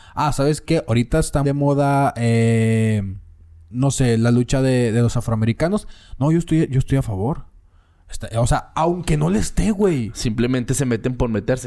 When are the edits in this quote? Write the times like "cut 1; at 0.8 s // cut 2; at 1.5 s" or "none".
cut 1; at 1.4 s